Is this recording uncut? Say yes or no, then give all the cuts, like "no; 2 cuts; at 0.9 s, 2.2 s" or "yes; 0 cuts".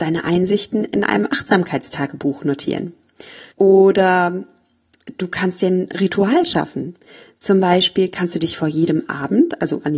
no; 1 cut; at 3.5 s